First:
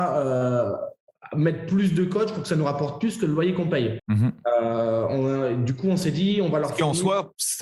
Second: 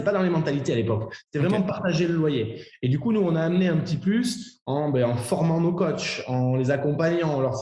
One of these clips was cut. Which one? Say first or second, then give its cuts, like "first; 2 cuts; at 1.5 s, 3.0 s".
first; 1 cut; at 4.0 s